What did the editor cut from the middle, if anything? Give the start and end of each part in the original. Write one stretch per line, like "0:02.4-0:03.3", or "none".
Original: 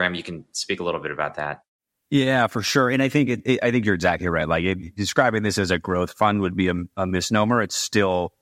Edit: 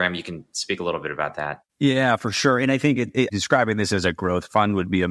0:01.7-0:02.0
0:03.6-0:04.9